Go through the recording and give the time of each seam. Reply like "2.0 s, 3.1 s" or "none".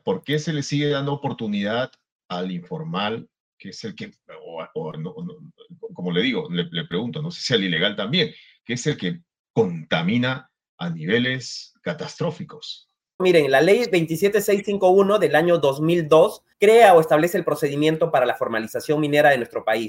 13.2 s, 16.5 s